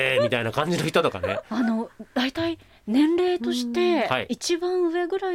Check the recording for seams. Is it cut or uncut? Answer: uncut